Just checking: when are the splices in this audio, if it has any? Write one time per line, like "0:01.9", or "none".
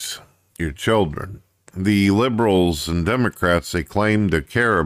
0:01.7